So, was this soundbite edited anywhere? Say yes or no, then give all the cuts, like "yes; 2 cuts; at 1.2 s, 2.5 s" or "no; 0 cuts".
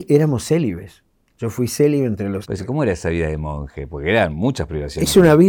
yes; 1 cut; at 2.4 s